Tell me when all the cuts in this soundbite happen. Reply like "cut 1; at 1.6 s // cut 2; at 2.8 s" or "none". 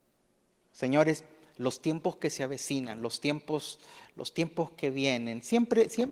none